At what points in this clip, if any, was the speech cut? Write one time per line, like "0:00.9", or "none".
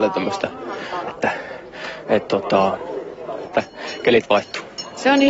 0:01.1
0:03.4